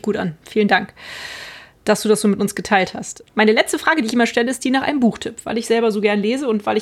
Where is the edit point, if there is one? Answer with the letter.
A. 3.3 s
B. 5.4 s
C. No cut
C